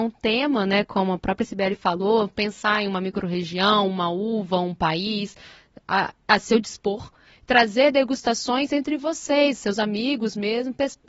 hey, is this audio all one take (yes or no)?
yes